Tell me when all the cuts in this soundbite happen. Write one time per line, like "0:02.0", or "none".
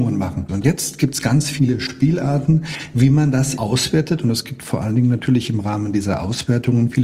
0:03.6

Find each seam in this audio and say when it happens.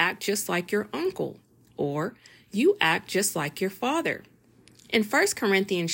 0:04.7

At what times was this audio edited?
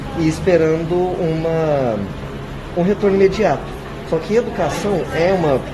none

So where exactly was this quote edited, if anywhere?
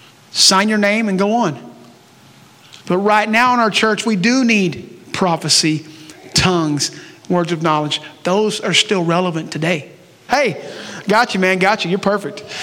0:02.8
0:10.3

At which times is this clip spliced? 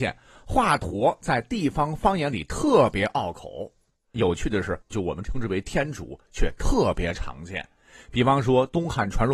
0:04.8

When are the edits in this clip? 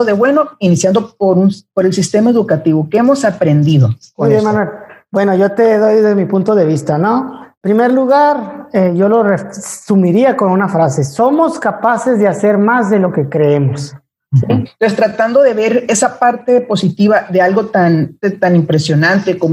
0:14.6
0:18.2

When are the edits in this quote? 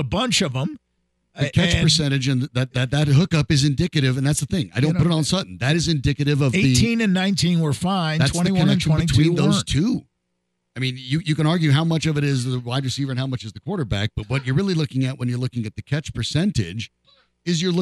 none

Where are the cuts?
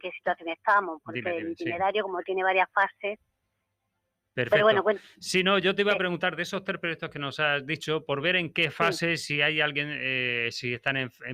none

